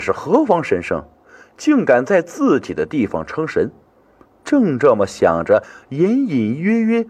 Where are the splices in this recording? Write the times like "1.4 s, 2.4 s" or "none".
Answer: 4.2 s